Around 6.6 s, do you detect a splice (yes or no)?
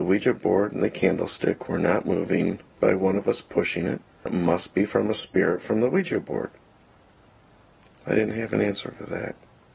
no